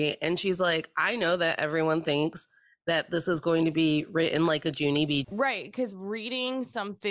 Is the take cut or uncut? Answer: cut